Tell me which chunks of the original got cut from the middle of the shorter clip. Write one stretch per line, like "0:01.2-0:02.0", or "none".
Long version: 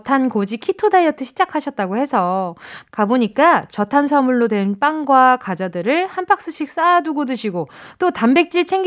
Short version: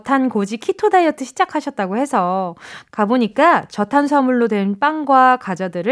none